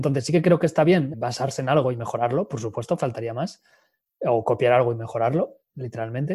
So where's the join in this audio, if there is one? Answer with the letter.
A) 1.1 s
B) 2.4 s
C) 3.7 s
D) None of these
A